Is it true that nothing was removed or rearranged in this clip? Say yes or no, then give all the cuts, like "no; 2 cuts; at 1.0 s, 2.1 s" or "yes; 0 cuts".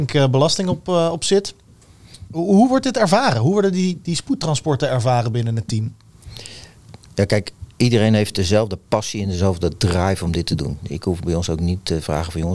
yes; 0 cuts